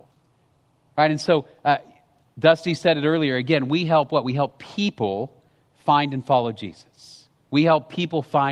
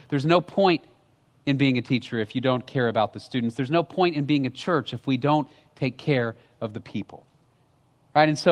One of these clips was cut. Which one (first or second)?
first